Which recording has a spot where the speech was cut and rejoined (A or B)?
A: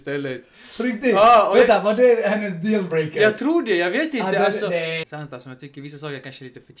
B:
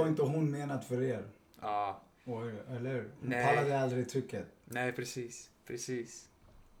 A